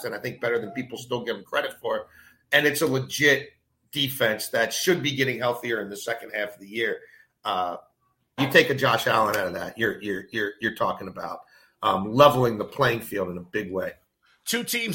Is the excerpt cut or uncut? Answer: cut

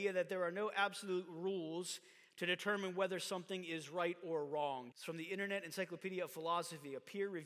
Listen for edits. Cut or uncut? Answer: cut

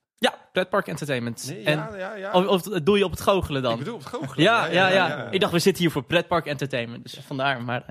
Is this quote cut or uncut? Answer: uncut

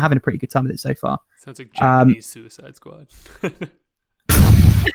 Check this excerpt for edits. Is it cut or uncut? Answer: uncut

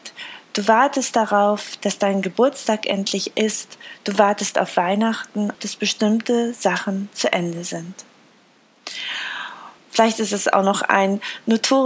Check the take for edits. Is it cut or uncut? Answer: cut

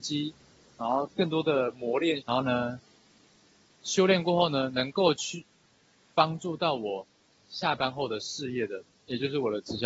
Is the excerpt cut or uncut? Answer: cut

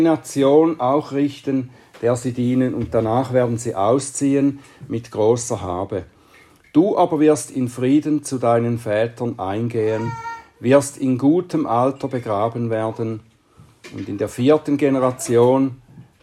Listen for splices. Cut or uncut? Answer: uncut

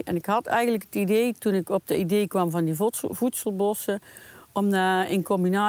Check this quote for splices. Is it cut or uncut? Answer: uncut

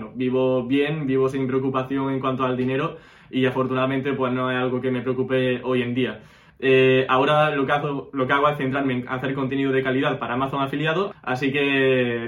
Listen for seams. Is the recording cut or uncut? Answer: cut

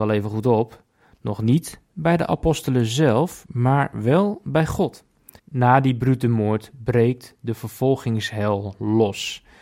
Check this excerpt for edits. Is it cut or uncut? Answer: cut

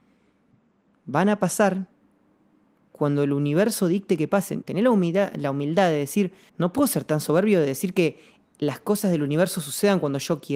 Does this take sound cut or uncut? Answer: cut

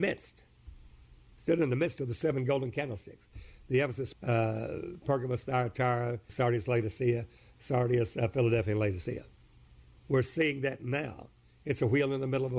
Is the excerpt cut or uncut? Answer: cut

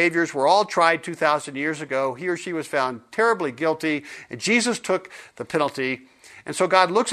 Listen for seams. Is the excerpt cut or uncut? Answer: uncut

